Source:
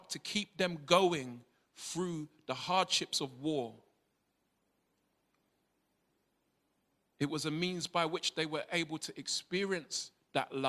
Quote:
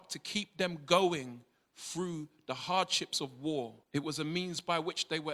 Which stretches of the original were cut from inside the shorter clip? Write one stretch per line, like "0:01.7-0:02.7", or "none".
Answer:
0:03.8-0:07.1